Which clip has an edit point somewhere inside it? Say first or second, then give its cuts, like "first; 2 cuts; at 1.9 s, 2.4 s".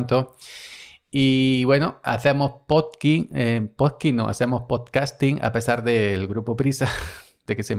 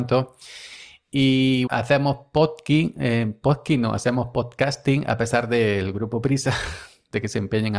second; 1 cut; at 1.7 s